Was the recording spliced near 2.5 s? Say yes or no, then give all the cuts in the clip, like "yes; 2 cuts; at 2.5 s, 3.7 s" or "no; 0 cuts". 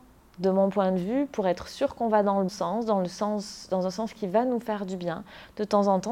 yes; 1 cut; at 2.5 s